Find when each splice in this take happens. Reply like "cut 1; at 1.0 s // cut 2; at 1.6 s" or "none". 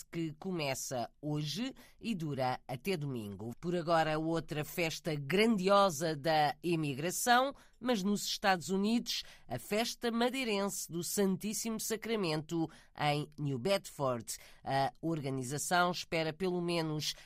cut 1; at 3.5 s